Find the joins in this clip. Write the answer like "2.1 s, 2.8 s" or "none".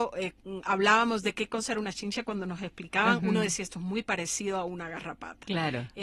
none